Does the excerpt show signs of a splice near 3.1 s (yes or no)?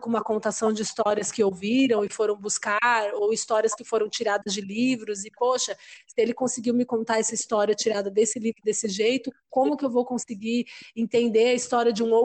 no